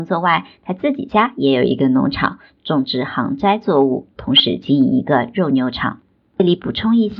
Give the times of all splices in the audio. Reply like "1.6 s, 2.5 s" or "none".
none